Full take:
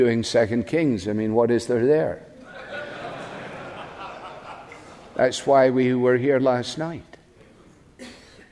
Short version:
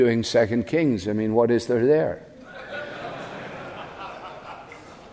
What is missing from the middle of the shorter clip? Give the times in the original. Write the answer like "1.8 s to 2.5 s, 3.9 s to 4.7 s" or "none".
none